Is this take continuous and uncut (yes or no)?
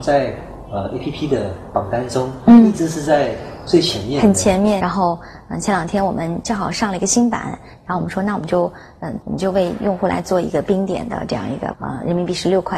no